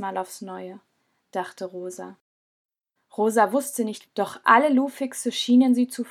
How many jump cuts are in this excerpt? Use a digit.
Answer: 2